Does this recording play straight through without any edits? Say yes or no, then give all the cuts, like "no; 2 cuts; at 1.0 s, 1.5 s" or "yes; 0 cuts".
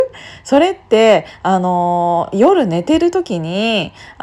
yes; 0 cuts